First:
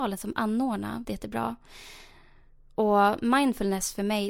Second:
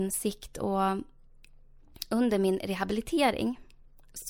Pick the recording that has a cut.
first; 1 cut; at 1.0 s

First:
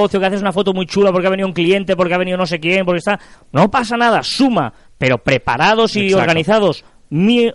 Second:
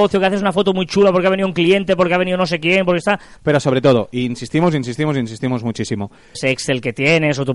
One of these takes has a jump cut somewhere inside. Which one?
second; 2 cuts; at 3.4 s, 6.3 s

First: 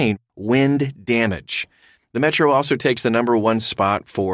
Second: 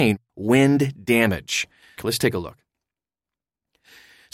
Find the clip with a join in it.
second; 1 cut; at 2.0 s

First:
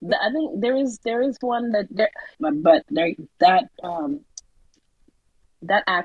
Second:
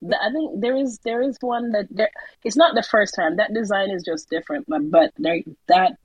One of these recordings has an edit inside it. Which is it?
first; 2 cuts; at 2.4 s, 3.7 s

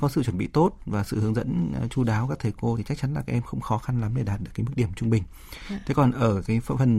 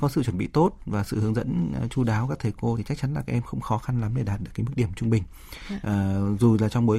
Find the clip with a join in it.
second; 1 cut; at 5.8 s

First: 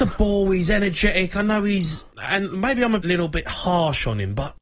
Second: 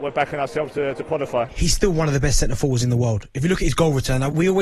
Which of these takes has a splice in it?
first; 1 cut; at 3.0 s

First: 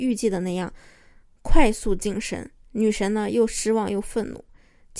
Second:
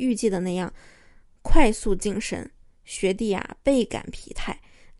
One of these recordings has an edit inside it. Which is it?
first; 1 cut; at 2.6 s

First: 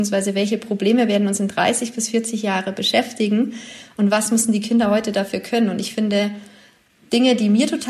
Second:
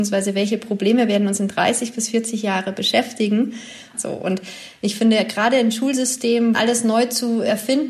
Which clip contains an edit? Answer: second; 2 cuts; at 3.9 s, 6.5 s

